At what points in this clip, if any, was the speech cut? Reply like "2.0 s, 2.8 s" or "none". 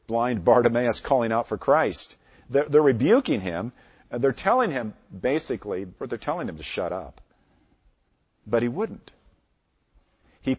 6.0 s